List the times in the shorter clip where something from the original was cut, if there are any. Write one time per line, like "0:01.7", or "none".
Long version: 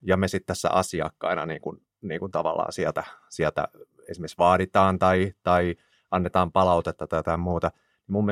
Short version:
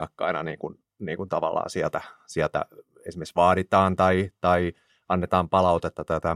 none